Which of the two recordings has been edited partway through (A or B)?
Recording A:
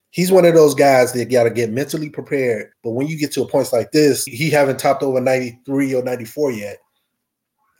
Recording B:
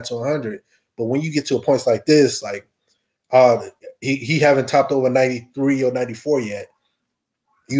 A